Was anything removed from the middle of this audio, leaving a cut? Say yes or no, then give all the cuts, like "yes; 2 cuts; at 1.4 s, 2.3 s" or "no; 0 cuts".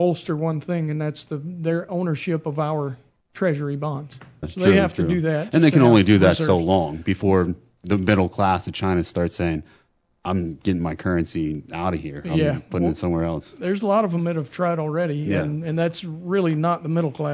yes; 1 cut; at 4.4 s